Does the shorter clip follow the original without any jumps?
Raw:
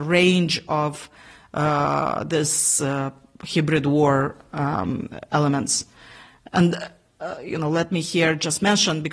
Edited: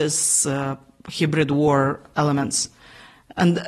no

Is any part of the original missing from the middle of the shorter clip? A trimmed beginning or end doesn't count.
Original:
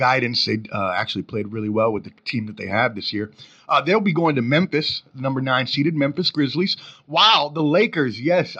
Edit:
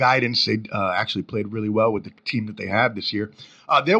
no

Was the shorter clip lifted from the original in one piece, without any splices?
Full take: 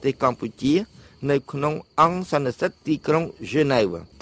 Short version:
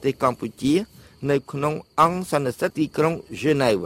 no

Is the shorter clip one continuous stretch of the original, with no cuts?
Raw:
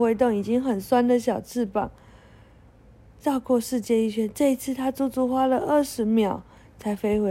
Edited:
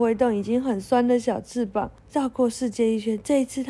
no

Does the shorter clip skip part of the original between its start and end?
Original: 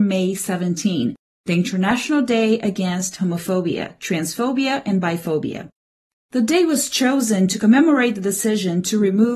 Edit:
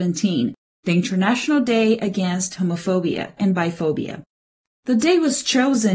yes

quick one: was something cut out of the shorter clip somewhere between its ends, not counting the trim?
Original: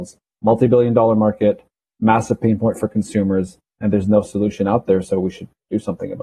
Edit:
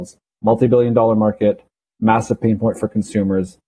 no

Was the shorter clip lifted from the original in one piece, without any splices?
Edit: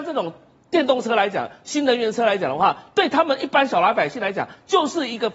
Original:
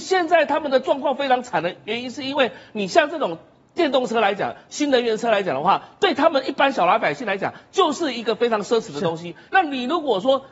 yes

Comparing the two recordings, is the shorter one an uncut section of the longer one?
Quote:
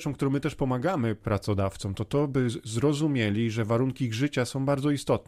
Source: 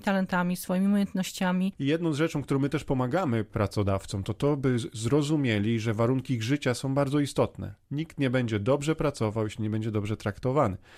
yes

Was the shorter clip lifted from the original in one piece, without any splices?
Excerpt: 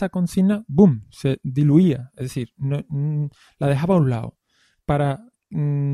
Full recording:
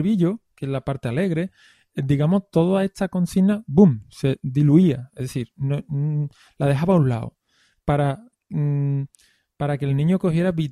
yes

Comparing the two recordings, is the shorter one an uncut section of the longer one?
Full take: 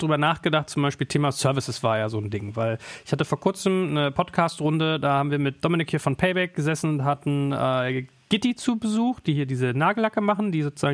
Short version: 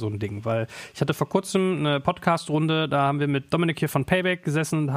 yes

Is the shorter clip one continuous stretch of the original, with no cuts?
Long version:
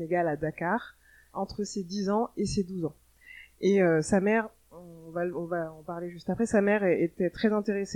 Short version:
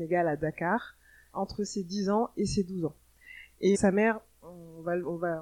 no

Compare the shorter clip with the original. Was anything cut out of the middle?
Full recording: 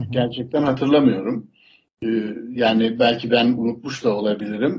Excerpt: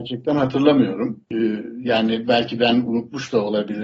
yes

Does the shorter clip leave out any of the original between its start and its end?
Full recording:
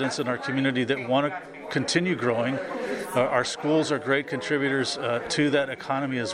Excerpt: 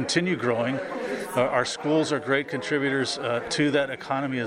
no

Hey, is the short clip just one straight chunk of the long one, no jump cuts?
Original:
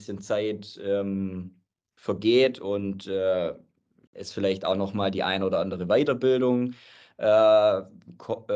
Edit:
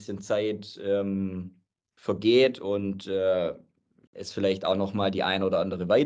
yes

